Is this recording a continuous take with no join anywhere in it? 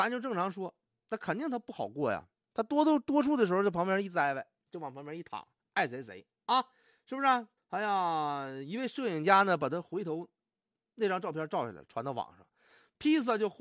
no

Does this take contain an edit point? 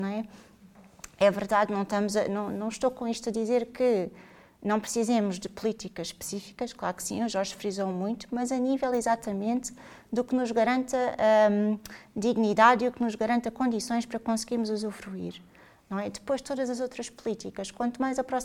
no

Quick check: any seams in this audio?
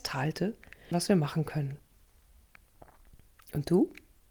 yes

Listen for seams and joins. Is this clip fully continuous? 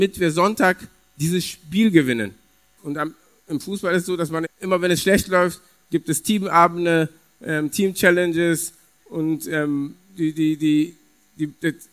no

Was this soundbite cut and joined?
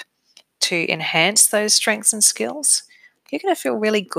no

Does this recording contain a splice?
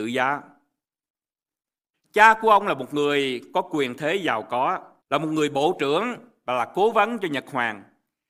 yes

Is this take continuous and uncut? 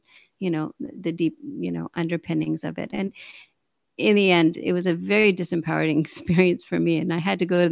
yes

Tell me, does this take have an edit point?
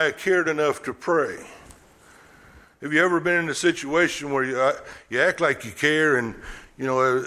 no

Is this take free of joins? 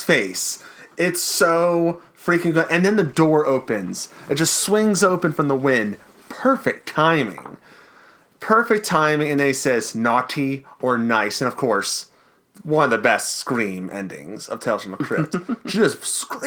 yes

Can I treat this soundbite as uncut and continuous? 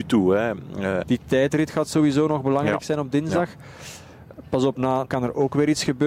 no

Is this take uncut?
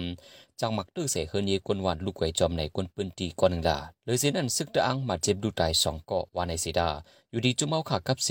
no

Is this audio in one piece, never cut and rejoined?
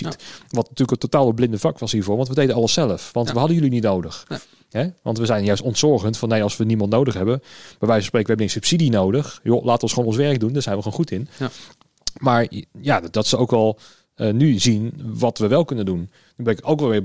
yes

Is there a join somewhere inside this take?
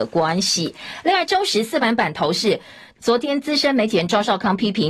yes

